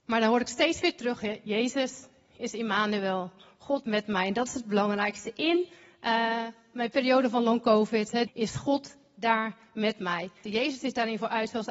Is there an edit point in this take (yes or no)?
yes